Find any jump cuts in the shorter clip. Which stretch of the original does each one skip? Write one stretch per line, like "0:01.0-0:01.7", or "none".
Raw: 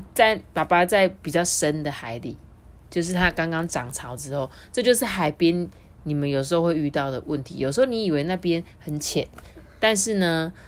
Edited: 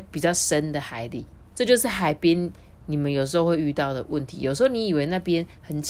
0:02.6-0:04.7